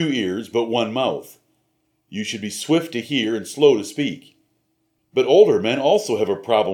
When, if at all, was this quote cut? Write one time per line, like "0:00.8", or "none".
0:05.0